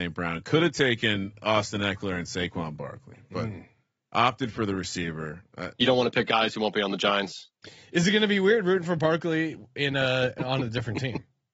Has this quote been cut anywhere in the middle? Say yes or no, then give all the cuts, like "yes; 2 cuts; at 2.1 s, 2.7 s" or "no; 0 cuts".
no; 0 cuts